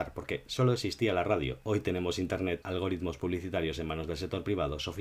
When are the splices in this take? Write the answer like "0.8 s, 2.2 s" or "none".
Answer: 2.6 s